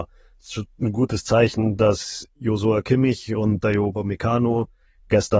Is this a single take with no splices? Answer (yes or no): yes